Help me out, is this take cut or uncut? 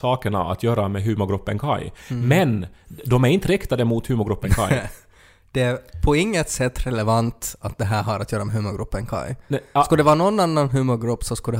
uncut